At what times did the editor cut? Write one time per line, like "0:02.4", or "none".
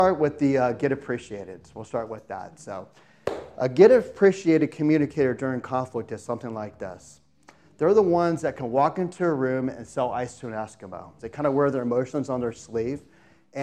0:11.2